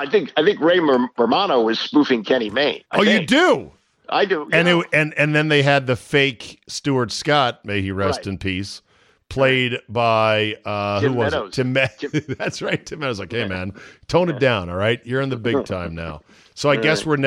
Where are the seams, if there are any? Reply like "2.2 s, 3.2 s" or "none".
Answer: 2.9 s